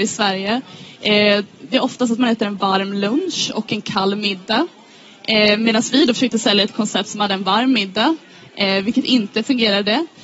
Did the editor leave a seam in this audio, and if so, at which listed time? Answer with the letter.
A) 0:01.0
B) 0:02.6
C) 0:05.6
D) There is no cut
D